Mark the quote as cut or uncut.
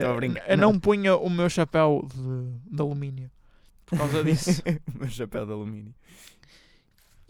uncut